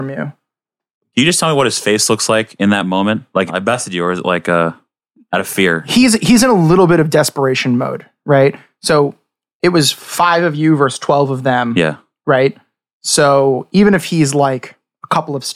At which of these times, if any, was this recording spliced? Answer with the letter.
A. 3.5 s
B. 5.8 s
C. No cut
A